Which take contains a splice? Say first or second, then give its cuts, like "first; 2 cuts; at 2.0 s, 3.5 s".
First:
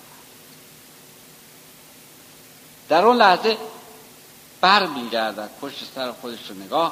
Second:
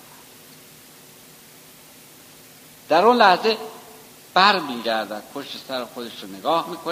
second; 1 cut; at 4.3 s